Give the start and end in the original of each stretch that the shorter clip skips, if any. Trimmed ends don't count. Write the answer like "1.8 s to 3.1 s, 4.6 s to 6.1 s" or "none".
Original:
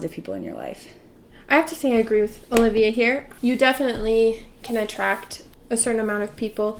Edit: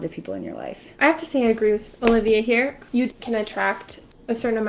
0.9 s to 1.4 s, 3.6 s to 4.5 s